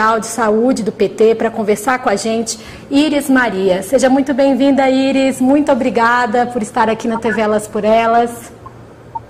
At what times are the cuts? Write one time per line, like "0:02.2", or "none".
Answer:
none